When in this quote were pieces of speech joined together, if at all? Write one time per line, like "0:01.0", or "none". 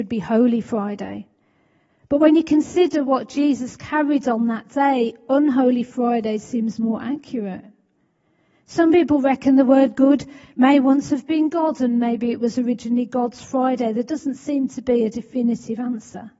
none